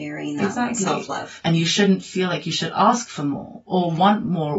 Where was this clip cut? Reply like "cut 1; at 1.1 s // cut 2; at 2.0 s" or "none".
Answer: cut 1; at 1.4 s